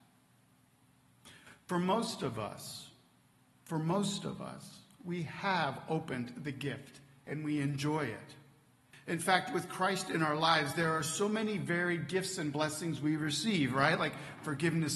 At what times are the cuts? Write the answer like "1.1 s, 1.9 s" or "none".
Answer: none